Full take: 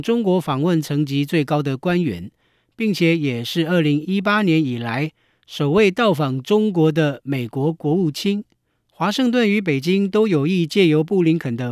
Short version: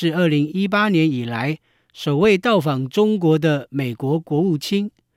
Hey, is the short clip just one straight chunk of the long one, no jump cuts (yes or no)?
yes